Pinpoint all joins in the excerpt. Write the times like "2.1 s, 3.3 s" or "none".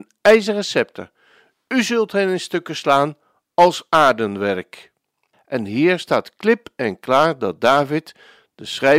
5.3 s

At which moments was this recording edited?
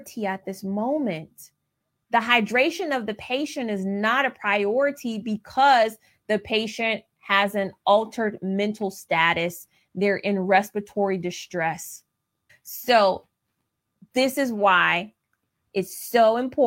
12.5 s

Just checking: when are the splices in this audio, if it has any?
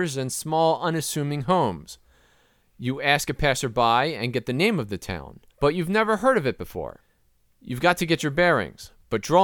5.5 s

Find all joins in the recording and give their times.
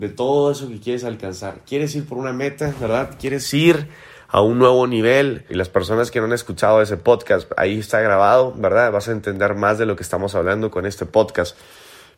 5.5 s

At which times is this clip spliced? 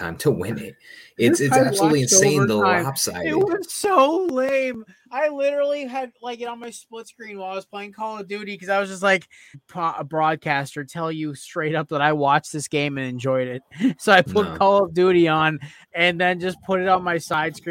9.5 s

